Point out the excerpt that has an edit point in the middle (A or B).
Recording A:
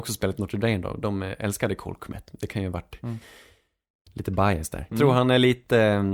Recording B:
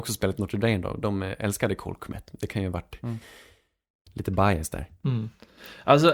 A